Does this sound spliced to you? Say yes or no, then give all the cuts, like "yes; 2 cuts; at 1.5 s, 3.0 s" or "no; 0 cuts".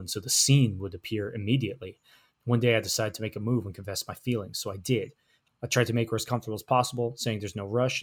yes; 2 cuts; at 2.3 s, 5.4 s